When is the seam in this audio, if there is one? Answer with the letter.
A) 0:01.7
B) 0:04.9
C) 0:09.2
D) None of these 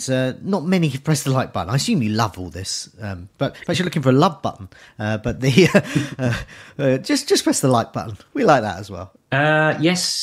C